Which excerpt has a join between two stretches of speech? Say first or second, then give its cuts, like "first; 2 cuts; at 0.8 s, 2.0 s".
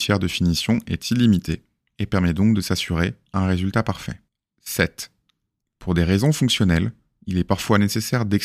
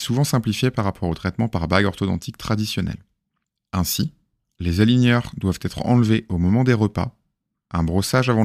first; 1 cut; at 5.6 s